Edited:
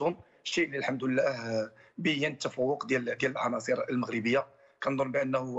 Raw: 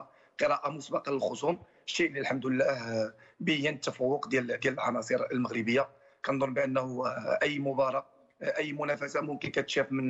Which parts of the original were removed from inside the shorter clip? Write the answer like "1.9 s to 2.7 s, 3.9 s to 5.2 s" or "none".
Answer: none